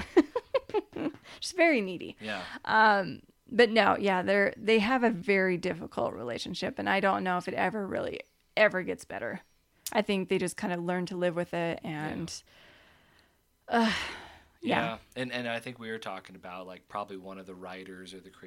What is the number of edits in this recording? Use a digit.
0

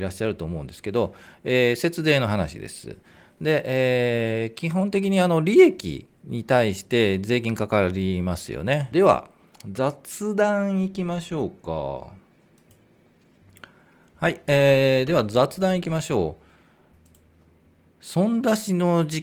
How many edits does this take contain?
1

